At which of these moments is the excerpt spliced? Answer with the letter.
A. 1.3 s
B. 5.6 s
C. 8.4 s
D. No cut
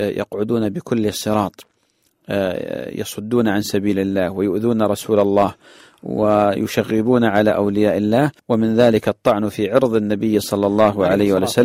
C